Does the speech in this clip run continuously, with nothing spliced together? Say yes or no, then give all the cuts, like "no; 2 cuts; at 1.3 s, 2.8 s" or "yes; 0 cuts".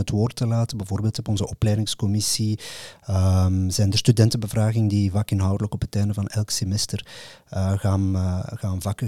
yes; 0 cuts